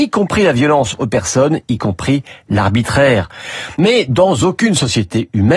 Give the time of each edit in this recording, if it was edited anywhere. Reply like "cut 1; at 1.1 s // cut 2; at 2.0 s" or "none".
cut 1; at 3.8 s

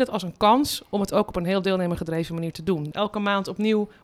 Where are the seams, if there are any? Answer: cut 1; at 2.9 s

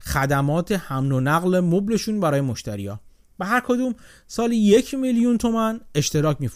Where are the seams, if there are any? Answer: none

